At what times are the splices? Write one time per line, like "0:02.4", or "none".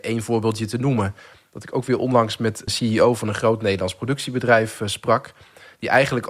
0:02.7